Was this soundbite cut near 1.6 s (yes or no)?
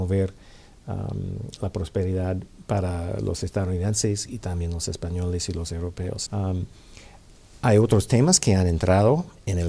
no